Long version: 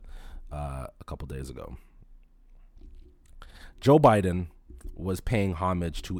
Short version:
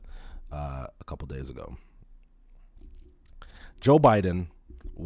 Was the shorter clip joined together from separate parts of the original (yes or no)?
no